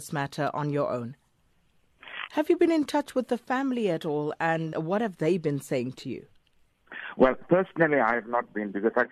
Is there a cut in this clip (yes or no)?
yes